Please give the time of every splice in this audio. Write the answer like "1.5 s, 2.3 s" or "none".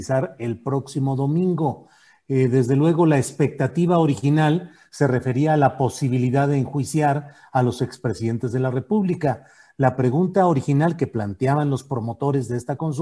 none